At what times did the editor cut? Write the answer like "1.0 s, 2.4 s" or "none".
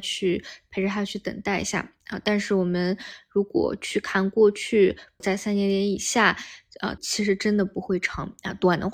5.2 s, 7.0 s